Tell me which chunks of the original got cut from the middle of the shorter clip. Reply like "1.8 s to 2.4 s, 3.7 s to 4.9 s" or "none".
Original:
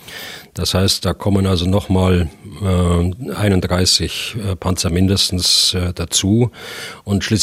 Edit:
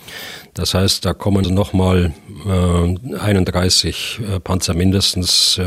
1.4 s to 1.6 s